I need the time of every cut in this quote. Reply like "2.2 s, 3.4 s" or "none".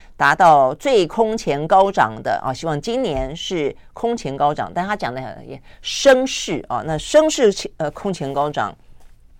none